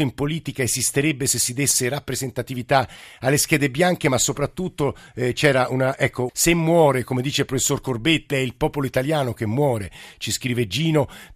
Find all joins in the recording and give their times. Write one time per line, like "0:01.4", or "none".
0:06.3
0:08.3